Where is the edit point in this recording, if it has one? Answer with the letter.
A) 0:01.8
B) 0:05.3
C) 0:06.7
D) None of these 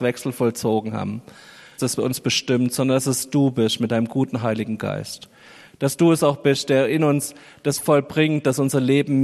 A